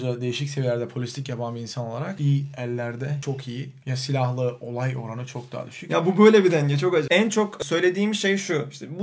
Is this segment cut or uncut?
cut